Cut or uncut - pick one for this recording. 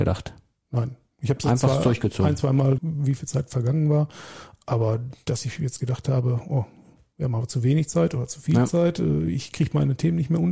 cut